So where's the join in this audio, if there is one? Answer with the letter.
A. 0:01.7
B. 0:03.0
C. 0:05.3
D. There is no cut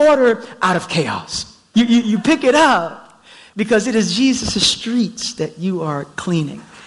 A